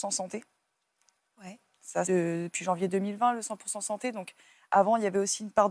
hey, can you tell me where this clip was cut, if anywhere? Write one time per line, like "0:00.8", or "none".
0:02.0